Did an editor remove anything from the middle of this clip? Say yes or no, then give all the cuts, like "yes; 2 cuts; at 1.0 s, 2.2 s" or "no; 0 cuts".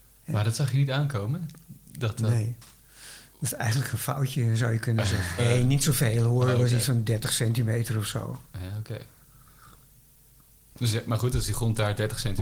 yes; 1 cut; at 5.4 s